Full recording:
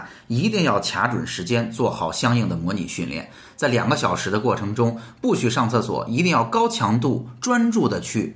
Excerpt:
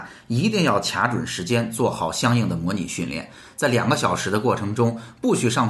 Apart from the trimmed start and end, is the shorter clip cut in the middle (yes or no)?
no